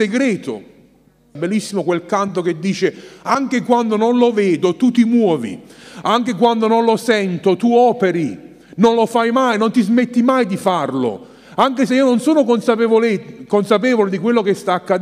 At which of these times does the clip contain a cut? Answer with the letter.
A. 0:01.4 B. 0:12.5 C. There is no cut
A